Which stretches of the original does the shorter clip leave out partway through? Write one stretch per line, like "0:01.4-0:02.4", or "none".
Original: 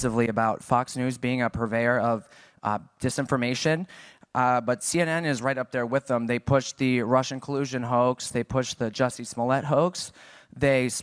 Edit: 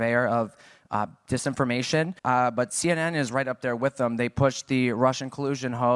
0:03.9-0:04.3